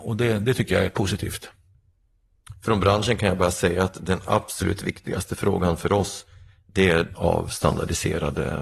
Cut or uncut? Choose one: cut